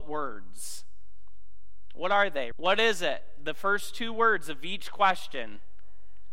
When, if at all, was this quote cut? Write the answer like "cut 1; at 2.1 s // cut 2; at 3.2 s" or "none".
cut 1; at 2.5 s